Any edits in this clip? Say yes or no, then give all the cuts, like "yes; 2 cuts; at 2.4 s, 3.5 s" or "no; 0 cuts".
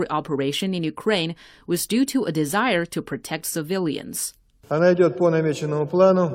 no; 0 cuts